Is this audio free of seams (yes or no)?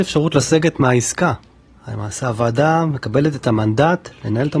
yes